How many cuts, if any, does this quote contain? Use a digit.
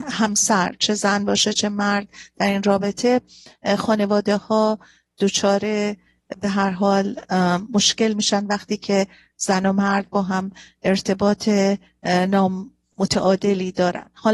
0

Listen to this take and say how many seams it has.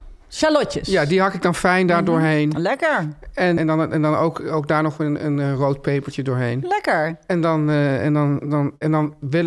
1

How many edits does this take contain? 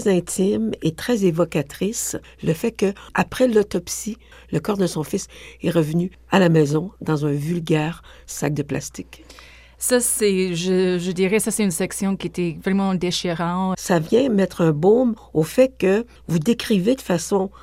2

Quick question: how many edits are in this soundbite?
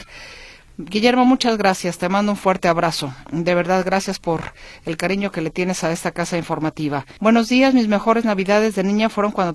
1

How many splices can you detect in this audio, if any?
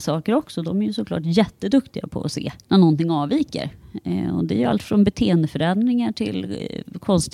1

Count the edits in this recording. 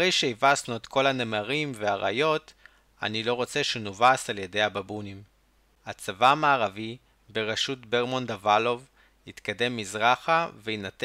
1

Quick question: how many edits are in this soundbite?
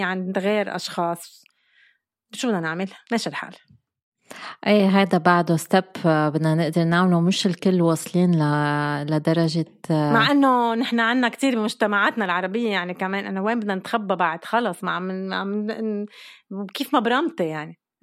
0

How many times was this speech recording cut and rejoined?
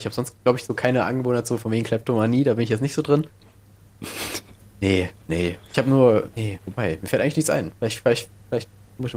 1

